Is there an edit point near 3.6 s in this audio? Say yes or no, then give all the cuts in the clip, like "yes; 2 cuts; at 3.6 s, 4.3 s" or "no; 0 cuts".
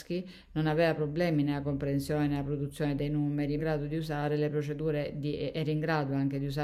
yes; 1 cut; at 3.6 s